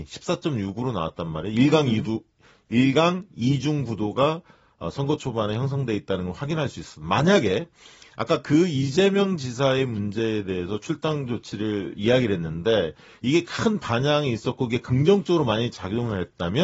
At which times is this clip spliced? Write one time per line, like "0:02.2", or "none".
none